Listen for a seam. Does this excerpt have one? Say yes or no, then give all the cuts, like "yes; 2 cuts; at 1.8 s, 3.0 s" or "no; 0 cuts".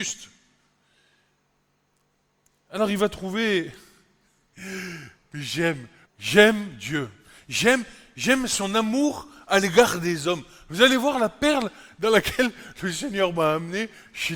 yes; 1 cut; at 6.0 s